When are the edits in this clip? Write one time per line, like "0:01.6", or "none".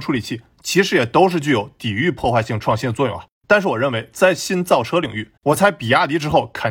0:03.3
0:05.4